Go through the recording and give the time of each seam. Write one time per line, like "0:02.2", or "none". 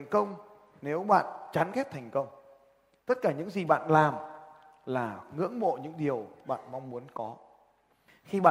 none